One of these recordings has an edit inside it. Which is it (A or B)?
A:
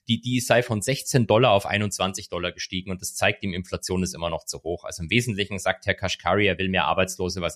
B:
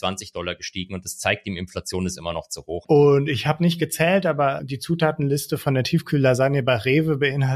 B